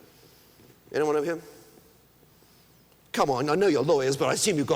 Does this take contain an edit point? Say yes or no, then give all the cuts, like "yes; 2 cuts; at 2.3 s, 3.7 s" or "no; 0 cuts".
no; 0 cuts